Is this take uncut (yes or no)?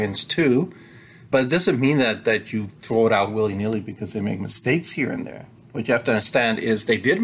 yes